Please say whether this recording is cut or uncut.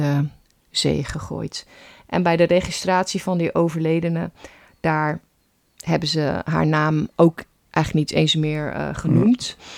uncut